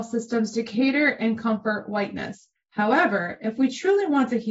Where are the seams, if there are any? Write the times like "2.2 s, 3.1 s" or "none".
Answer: 2.6 s